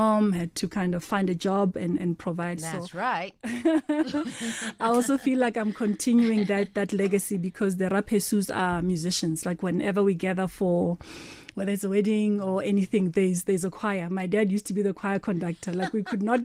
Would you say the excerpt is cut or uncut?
uncut